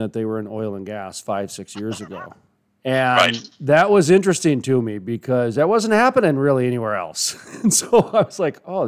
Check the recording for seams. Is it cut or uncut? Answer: uncut